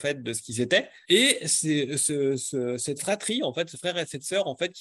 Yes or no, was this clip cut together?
yes